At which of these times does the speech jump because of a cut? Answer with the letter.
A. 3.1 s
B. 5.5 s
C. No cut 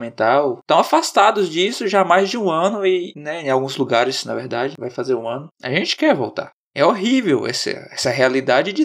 B